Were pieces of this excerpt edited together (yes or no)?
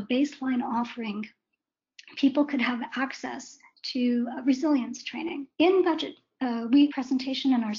yes